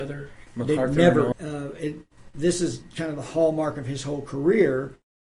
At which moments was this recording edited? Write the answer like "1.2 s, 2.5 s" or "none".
1.3 s